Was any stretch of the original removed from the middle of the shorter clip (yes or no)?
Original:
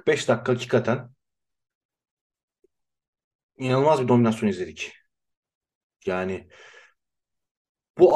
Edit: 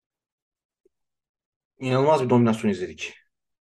no